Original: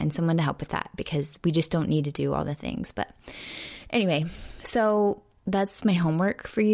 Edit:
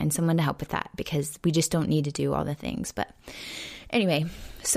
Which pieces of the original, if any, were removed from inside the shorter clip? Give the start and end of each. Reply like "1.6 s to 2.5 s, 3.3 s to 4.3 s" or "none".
none